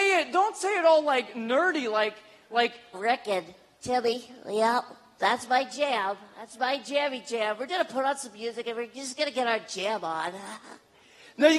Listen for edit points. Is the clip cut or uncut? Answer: cut